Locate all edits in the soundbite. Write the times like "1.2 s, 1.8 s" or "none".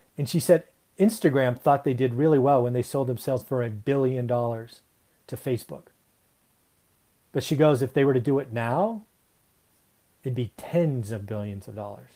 none